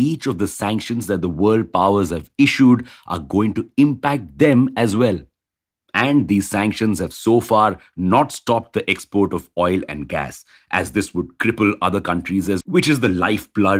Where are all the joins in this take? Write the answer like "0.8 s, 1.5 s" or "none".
12.6 s